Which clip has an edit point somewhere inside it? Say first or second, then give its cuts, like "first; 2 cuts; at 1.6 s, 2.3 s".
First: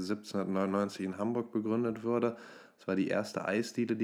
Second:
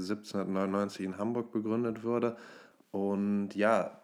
second; 1 cut; at 2.7 s